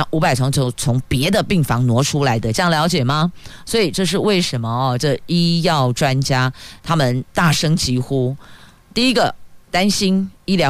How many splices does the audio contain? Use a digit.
1